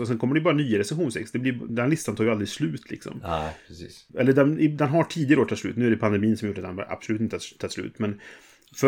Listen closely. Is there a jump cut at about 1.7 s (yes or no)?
yes